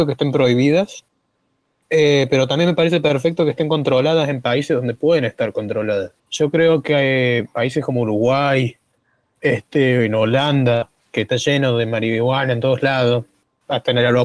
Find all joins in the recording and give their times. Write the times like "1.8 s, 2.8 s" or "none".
6.2 s